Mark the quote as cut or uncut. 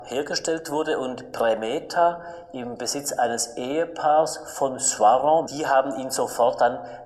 cut